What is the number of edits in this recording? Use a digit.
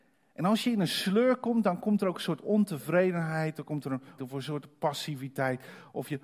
1